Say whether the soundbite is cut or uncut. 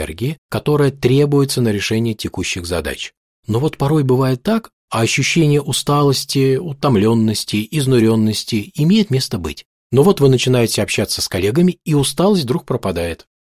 cut